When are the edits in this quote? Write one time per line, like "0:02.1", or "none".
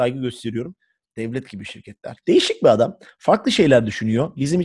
0:01.1
0:02.2